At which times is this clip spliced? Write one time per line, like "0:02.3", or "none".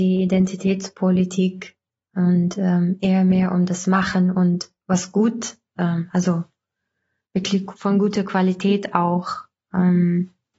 none